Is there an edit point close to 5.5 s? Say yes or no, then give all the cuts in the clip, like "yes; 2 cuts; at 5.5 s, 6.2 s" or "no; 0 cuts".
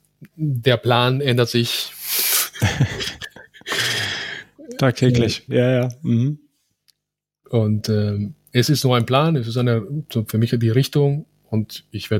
yes; 1 cut; at 5.5 s